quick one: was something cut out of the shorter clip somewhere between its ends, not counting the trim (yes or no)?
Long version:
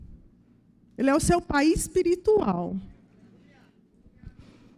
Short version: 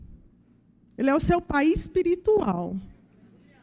no